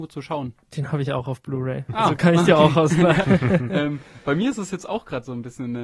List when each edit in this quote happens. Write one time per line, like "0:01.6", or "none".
0:03.2